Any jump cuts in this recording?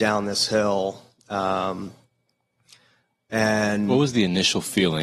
no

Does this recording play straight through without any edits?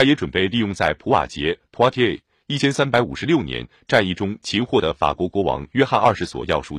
yes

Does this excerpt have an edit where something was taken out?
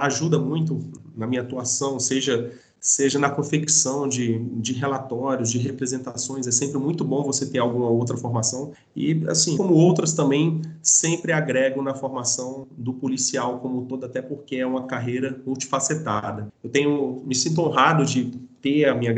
yes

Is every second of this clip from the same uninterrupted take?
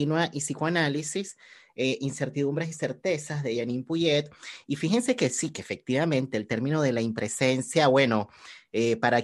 yes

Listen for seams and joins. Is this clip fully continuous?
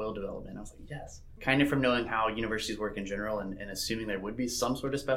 no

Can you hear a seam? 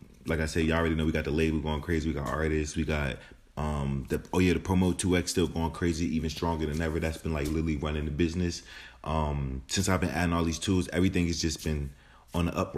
yes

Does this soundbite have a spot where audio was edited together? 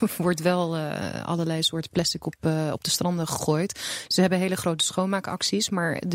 no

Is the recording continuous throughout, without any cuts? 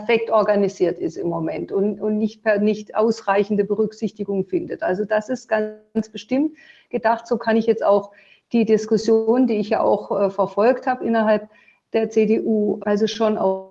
no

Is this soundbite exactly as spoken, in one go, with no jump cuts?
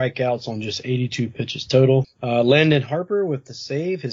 no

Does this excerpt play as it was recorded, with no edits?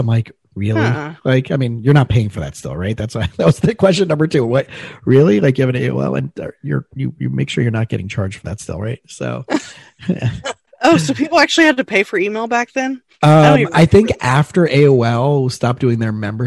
yes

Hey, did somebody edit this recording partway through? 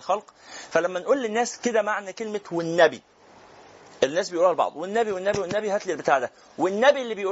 no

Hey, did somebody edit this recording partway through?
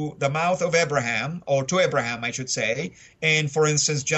no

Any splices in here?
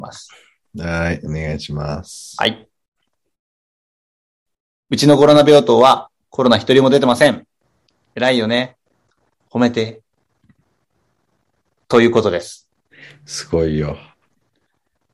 yes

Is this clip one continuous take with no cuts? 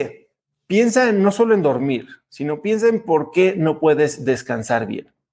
yes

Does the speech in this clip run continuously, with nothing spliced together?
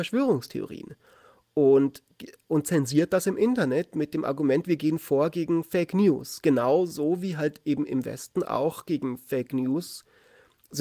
yes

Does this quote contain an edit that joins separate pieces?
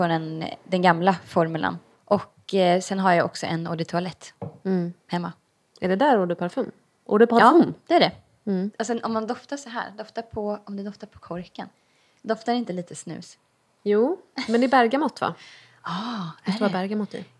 yes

